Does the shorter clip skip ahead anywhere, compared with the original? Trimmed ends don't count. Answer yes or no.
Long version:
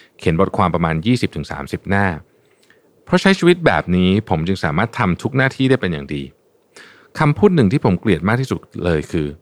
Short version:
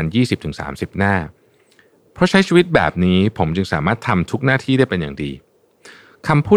no